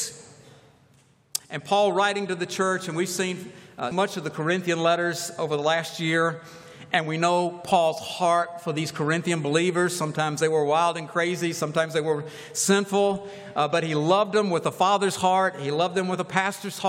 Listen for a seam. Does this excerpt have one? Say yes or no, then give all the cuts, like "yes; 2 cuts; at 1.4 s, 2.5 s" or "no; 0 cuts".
yes; 1 cut; at 3.9 s